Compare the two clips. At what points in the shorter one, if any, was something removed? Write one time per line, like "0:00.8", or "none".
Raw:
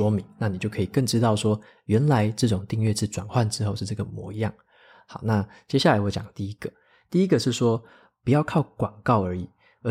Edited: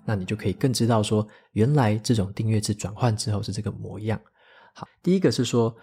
0:04.9